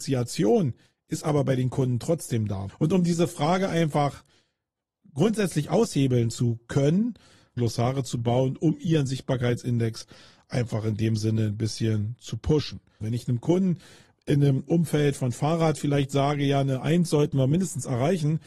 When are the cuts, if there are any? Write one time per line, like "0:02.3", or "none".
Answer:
0:02.7
0:07.6
0:13.0